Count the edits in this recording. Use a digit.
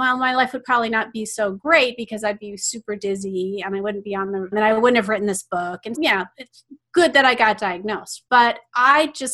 2